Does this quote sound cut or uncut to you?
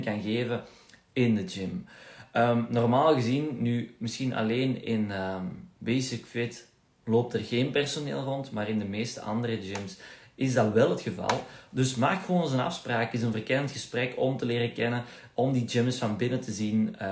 uncut